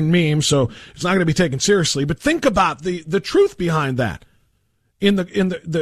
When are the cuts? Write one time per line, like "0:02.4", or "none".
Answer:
none